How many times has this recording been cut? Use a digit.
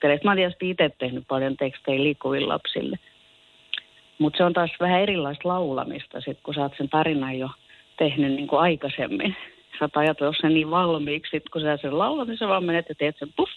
0